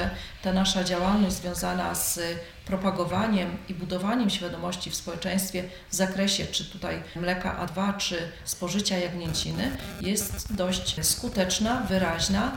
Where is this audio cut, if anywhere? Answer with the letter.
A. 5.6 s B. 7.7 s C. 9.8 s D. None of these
B